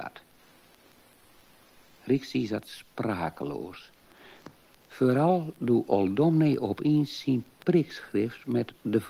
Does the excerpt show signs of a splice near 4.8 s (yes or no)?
no